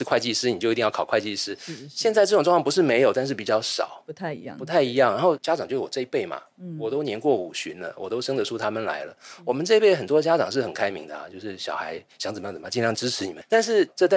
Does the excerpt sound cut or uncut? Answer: uncut